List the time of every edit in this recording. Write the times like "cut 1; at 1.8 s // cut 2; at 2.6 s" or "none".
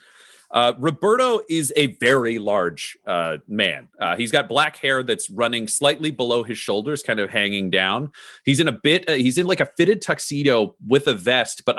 none